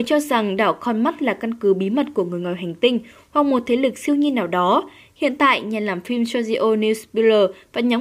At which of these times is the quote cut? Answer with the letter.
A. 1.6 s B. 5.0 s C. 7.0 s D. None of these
D